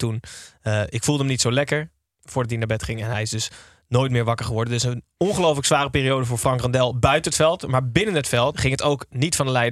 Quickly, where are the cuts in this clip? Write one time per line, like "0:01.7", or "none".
0:08.5